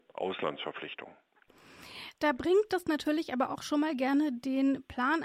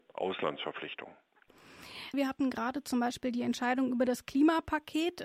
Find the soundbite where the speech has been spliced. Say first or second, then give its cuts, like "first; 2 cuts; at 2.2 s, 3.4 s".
second; 1 cut; at 2.1 s